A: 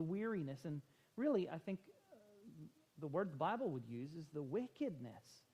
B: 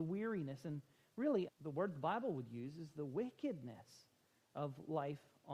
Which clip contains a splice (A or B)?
B